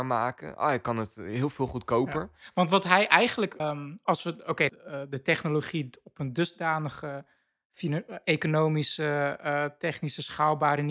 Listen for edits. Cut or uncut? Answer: cut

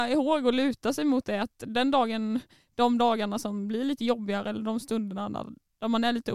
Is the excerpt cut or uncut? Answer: uncut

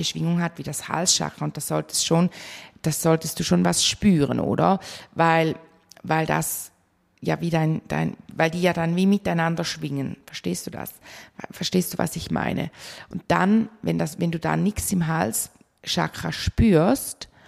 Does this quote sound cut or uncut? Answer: uncut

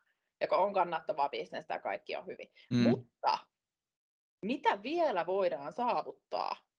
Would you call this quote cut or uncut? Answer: cut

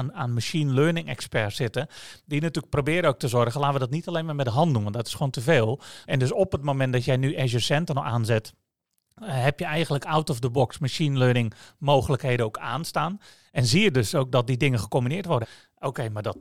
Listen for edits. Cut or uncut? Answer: cut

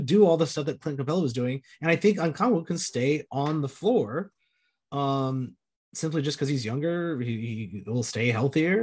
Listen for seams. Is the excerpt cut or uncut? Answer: uncut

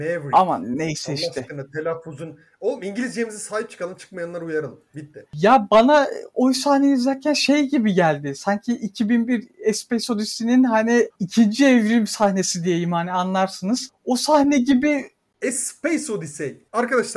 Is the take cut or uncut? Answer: cut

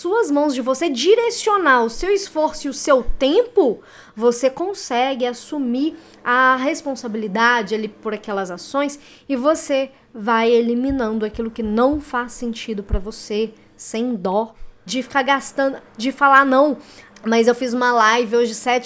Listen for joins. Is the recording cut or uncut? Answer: cut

